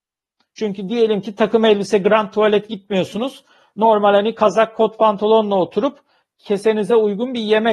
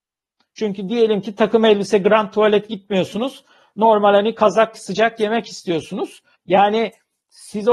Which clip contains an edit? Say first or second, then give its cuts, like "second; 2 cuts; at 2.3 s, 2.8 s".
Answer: second; 2 cuts; at 4.7 s, 6.3 s